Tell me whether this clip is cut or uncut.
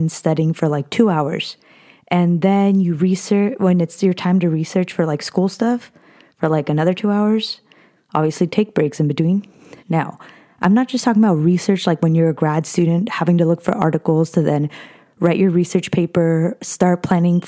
cut